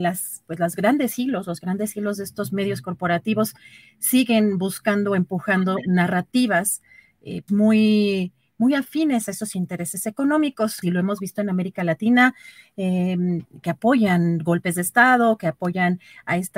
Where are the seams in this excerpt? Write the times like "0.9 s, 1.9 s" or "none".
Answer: 7.5 s, 10.8 s

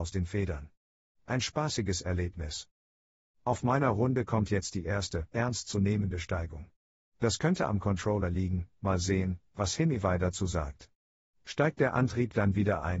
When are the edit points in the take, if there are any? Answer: 5.3 s, 7.1 s

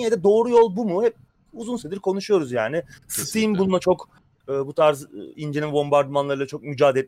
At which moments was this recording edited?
none

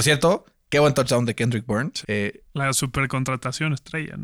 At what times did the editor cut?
2.0 s

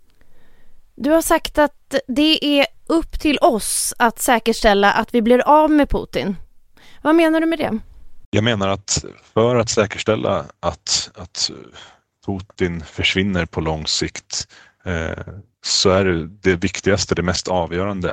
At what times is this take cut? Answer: none

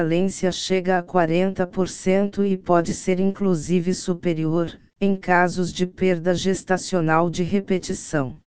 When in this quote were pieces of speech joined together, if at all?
4.9 s

